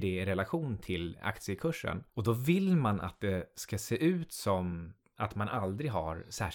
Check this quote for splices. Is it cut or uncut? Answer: uncut